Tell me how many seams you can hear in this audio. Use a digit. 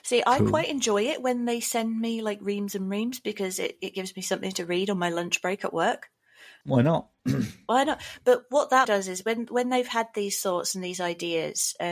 2